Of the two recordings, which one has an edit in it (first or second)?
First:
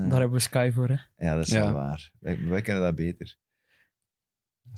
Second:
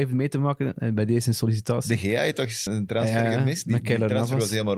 second